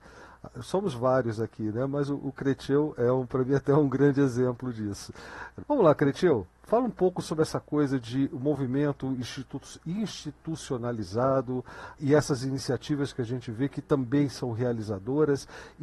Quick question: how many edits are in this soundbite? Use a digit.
2